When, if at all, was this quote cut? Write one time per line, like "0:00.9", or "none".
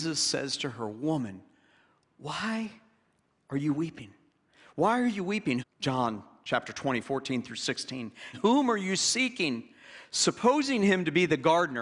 0:05.6
0:08.3